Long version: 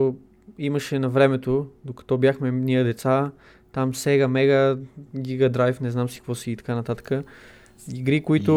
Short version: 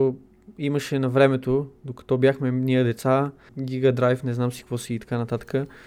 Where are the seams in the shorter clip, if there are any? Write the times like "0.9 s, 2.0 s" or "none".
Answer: 3.5 s